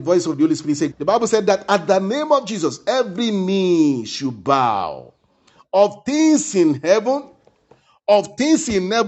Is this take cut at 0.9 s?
yes; 1 cut; at 0.9 s

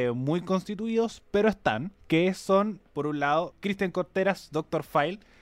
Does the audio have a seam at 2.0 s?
yes; 1 cut; at 2.0 s

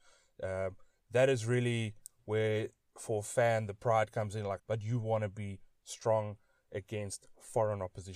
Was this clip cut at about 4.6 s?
yes; 1 cut; at 4.6 s

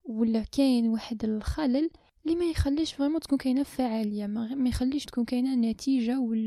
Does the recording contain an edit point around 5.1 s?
yes; 1 cut; at 5.1 s

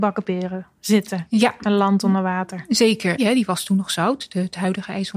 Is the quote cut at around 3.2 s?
yes; 1 cut; at 3.2 s

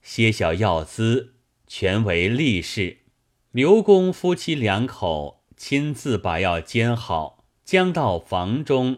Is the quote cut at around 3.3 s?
yes; 2 cuts; at 3.3 s, 7.6 s

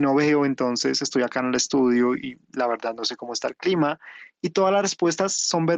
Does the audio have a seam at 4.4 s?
no; 0 cuts

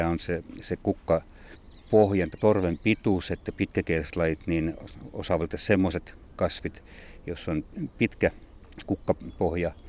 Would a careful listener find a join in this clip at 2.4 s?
yes; 1 cut; at 2.4 s

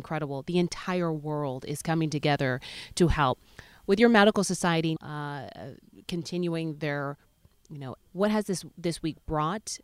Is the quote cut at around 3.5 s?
no; 2 cuts; at 5.0 s, 8.0 s

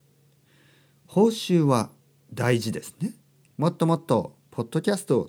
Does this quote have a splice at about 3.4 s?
yes; 1 cut; at 3.4 s

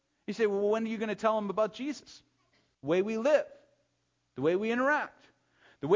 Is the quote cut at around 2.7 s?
yes; 1 cut; at 2.7 s

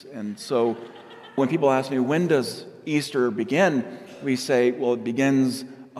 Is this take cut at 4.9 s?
no; 1 cut; at 1.4 s

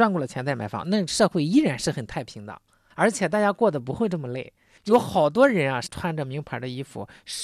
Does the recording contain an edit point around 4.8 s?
yes; 2 cuts; at 4.8 s, 5.9 s

